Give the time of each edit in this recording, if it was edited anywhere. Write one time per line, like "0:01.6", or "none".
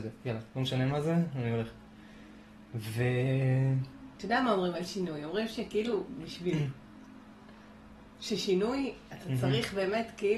0:04.2
0:09.1